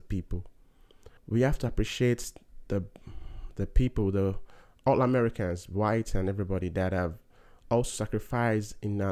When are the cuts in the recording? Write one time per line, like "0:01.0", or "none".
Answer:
0:01.2